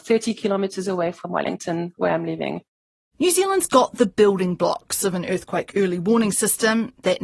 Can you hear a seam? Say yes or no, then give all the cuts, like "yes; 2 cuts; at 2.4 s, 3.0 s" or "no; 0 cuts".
no; 0 cuts